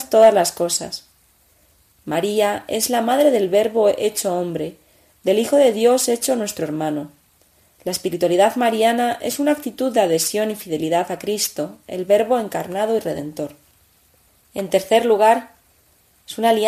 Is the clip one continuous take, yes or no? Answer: yes